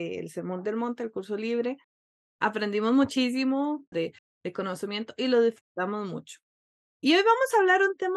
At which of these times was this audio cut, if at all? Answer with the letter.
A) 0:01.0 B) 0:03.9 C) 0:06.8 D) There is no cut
B